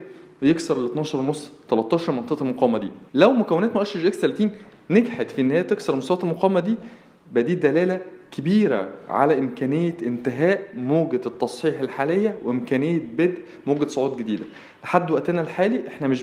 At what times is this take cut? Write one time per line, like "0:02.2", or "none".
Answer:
0:03.1